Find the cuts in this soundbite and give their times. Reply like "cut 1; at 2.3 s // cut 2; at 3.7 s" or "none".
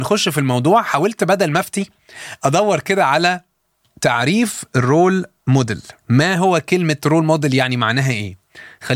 cut 1; at 6.0 s